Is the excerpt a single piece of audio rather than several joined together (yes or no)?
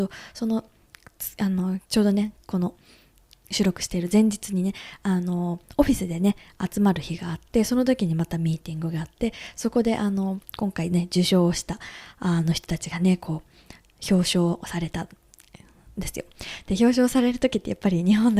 no